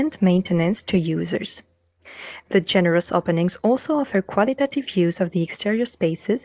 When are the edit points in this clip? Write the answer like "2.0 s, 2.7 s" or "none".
2.4 s